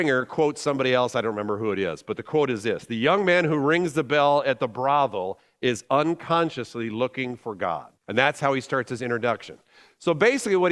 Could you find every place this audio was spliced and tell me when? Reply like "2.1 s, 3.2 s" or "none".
7.9 s